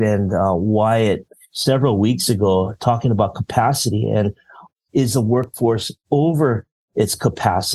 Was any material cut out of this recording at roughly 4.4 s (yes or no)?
no